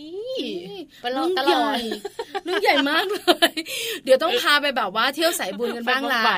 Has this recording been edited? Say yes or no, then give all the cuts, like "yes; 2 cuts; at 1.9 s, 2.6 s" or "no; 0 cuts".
no; 0 cuts